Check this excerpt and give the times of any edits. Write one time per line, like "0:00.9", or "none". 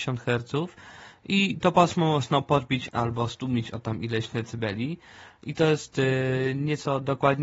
0:02.9